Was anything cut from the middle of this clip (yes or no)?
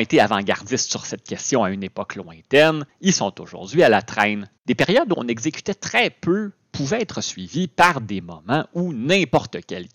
yes